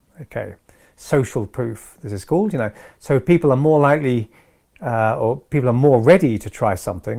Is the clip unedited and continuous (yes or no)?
yes